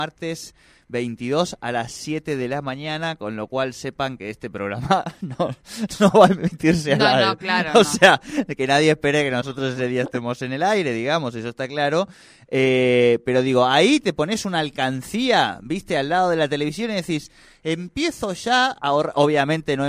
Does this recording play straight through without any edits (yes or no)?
yes